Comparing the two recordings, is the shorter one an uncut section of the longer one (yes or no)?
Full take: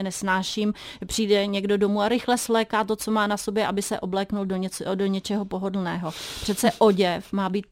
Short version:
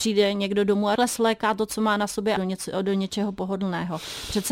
no